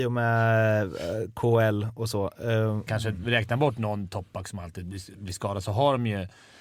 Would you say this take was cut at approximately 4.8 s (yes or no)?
no